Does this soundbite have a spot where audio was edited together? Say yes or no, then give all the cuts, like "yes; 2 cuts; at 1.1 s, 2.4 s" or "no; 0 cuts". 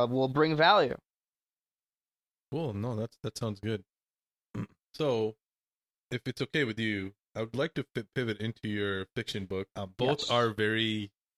yes; 1 cut; at 9.7 s